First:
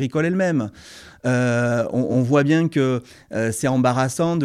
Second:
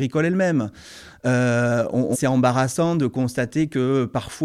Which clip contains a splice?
second; 1 cut; at 2.1 s

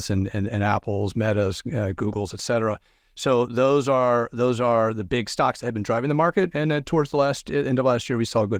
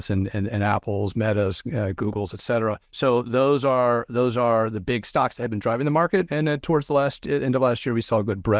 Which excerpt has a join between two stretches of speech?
second; 1 cut; at 2.8 s

